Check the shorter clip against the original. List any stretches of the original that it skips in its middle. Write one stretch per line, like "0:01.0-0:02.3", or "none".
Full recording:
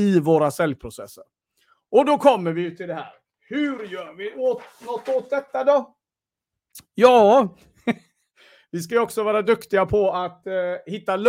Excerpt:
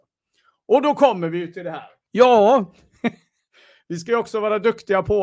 0:03.3-0:06.9